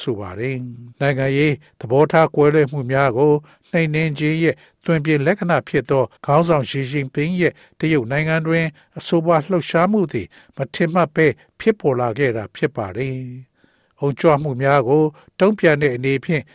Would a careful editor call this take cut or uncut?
cut